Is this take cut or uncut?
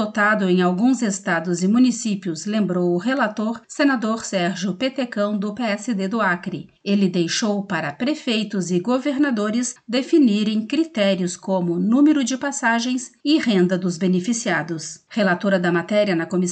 uncut